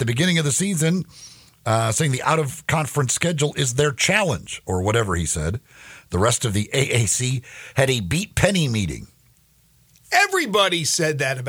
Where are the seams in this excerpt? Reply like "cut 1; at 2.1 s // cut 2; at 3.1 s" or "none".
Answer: none